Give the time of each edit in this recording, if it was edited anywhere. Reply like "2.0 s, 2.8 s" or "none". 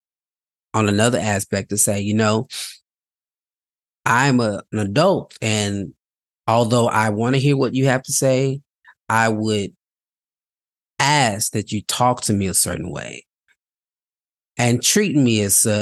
none